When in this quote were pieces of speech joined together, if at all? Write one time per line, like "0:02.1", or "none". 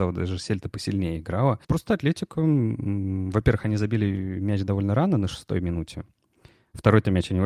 0:01.6